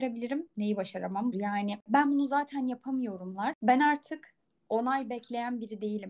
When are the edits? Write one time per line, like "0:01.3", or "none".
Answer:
0:01.3
0:03.6